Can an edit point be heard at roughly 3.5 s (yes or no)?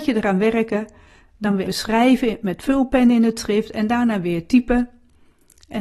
no